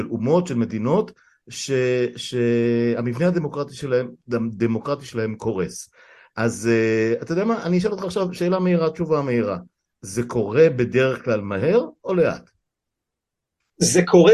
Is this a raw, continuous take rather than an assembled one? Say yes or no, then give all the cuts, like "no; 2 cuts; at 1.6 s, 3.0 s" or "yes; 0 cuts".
yes; 0 cuts